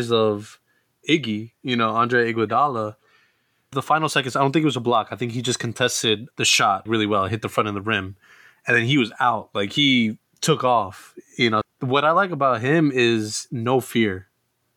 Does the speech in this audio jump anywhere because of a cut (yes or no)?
yes